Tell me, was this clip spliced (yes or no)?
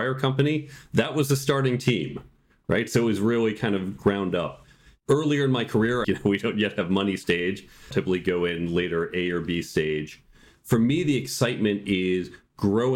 yes